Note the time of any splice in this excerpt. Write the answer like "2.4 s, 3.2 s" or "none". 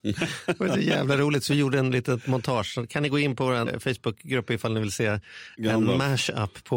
none